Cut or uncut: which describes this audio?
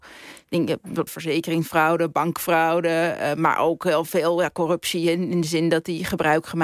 cut